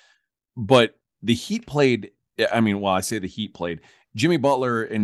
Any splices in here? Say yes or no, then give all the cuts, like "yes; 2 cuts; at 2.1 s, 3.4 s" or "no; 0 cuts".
no; 0 cuts